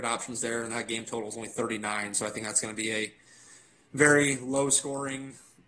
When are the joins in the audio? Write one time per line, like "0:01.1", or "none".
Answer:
none

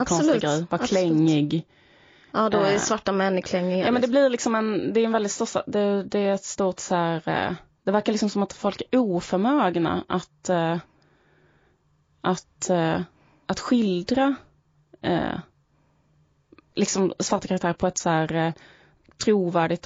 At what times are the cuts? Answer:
none

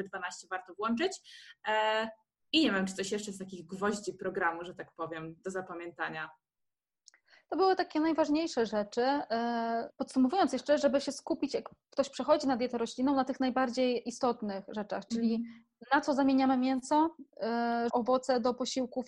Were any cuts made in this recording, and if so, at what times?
0:09.9
0:17.9

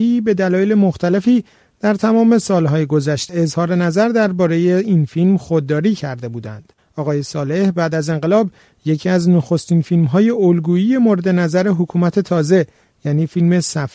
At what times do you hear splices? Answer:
0:03.3

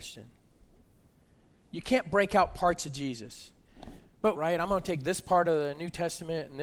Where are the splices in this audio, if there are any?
0:04.4

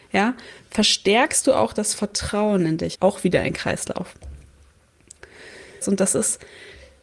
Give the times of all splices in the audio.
0:02.9
0:05.8

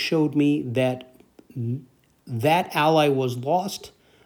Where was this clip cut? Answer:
none

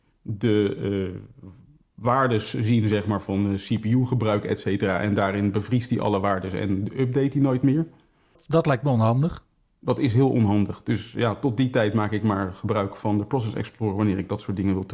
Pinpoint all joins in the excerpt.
none

